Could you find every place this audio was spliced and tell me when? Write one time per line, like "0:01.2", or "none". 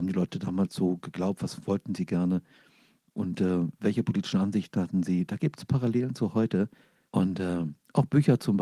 0:07.1